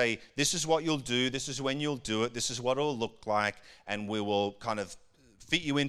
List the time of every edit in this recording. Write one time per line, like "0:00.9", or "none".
none